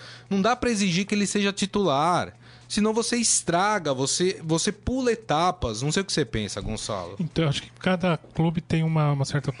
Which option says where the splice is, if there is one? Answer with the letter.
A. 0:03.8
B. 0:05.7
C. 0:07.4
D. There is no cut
D